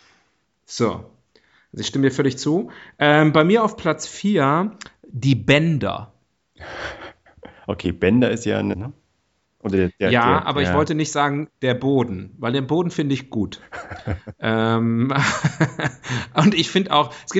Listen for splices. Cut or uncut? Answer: cut